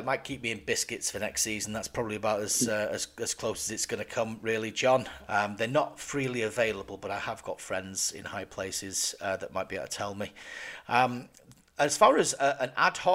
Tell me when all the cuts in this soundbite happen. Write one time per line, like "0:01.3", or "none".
0:05.2